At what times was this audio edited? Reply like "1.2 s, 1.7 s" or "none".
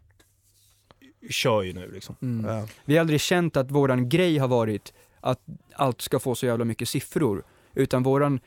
none